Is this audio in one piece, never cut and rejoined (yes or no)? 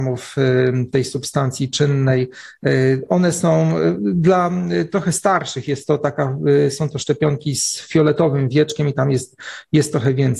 yes